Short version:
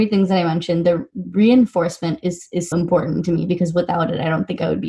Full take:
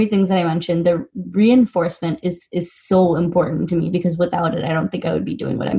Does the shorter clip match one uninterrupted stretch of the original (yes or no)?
no